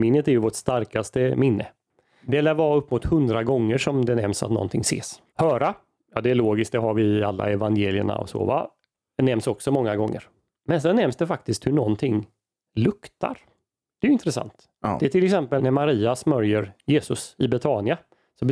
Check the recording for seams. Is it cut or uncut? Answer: cut